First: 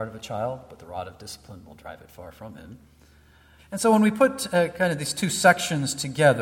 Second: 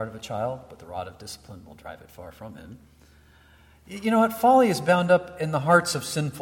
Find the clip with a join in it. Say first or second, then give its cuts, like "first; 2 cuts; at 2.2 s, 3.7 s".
first; 1 cut; at 3.6 s